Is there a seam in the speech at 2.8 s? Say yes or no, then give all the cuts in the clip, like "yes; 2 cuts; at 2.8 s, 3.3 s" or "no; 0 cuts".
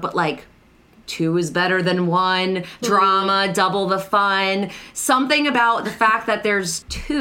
yes; 1 cut; at 2.8 s